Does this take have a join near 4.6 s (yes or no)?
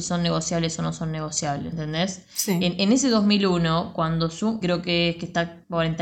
yes